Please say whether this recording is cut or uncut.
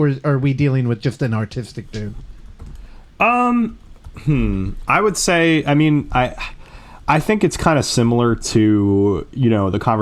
uncut